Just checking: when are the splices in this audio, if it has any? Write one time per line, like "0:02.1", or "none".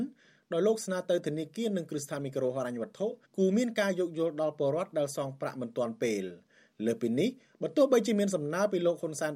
0:03.2